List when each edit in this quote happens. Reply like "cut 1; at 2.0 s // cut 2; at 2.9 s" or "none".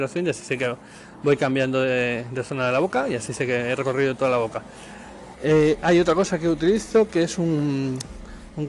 cut 1; at 5.3 s